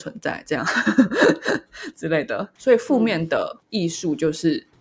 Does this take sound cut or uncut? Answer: cut